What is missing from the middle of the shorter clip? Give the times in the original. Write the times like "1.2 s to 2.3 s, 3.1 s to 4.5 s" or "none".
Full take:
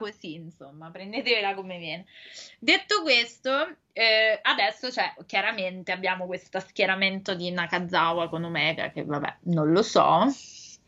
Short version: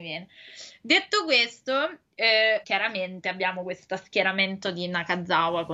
4.4 s to 5.3 s